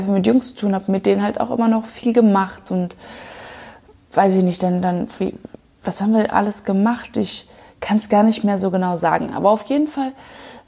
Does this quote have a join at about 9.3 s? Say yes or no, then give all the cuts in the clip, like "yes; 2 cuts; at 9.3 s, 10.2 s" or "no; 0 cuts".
no; 0 cuts